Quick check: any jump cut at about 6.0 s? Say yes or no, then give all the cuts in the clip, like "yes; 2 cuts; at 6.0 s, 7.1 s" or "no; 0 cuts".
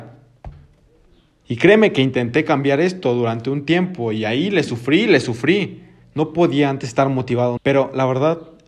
yes; 2 cuts; at 6.0 s, 7.6 s